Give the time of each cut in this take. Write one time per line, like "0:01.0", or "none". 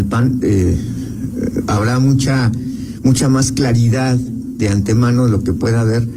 none